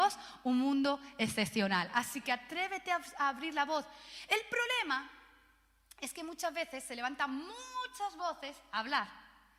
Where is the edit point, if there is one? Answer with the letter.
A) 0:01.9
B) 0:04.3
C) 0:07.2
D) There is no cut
D